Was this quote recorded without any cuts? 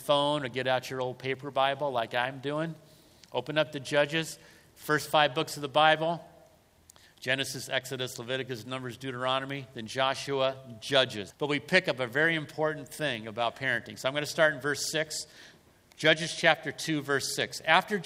no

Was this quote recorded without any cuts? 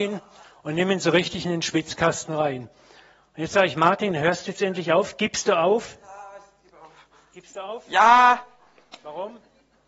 yes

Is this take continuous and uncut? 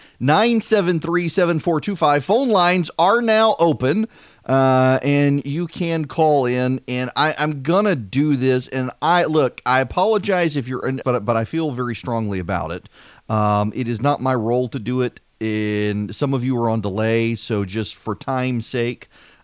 no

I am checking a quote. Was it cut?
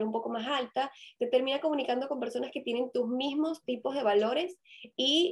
no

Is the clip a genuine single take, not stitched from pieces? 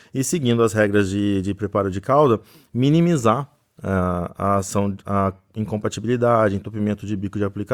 yes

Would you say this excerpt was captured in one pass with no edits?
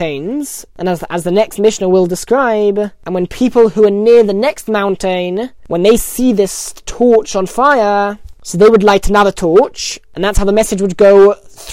no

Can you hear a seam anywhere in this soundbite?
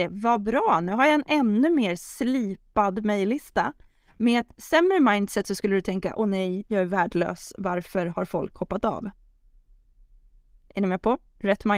no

